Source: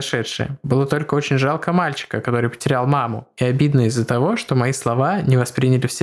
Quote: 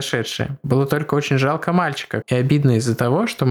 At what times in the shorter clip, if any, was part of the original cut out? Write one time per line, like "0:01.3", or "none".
0:02.2